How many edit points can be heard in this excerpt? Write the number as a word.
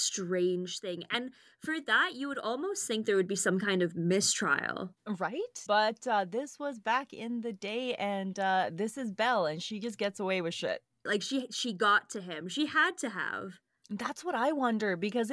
two